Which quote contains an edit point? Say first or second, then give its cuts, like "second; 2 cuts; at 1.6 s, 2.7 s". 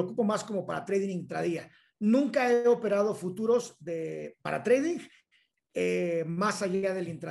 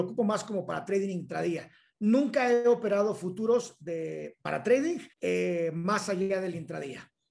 second; 1 cut; at 5.1 s